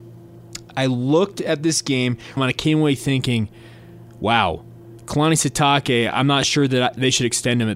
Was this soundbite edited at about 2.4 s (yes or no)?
yes